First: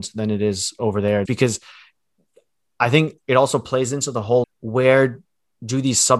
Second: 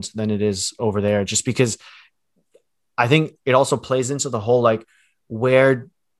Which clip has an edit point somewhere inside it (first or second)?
first